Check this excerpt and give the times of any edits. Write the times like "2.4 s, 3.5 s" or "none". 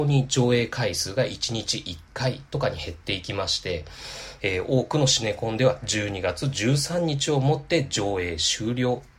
4.4 s